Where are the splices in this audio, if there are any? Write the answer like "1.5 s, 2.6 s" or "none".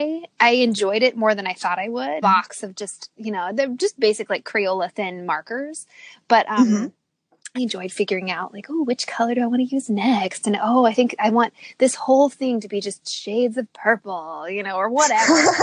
2.2 s, 7.5 s